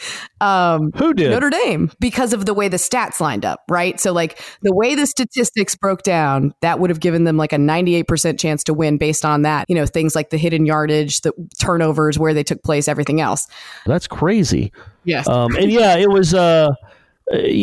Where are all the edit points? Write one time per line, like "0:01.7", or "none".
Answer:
0:09.6
0:13.9